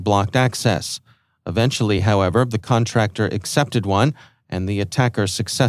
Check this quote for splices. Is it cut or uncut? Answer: uncut